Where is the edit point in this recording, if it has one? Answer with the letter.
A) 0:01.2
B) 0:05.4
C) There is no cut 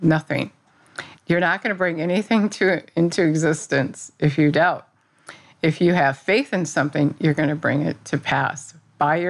A